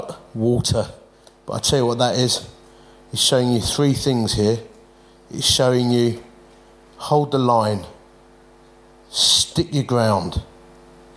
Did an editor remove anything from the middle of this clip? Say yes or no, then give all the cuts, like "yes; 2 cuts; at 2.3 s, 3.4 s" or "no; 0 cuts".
no; 0 cuts